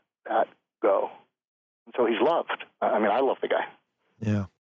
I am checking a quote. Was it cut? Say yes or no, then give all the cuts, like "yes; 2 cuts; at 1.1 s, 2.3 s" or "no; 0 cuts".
no; 0 cuts